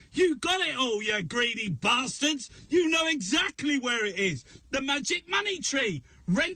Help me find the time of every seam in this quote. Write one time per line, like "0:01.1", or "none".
0:04.6